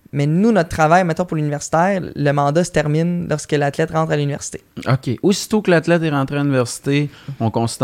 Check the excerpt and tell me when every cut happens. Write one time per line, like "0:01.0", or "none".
none